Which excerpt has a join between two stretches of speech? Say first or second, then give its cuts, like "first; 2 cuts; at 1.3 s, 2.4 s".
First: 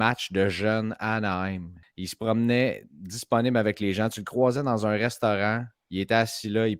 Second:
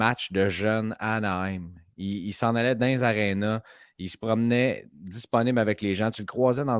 first; 1 cut; at 1.8 s